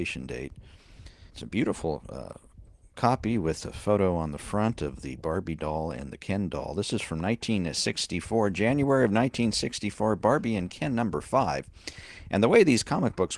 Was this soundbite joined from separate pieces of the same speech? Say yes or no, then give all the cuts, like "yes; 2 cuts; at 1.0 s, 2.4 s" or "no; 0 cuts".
yes; 1 cut; at 1.3 s